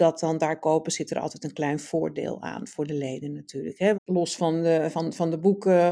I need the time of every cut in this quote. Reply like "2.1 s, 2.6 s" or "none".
3.9 s

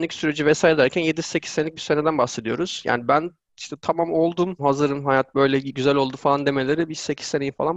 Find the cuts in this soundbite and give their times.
4.6 s

